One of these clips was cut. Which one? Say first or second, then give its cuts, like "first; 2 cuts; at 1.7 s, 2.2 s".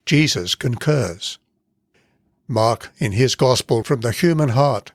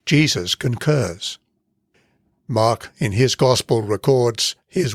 first; 1 cut; at 3.8 s